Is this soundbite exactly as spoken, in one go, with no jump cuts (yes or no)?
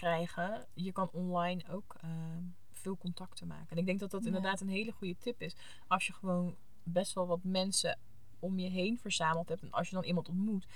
yes